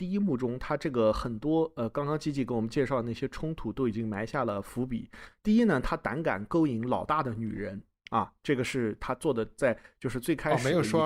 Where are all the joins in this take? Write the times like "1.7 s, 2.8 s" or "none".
none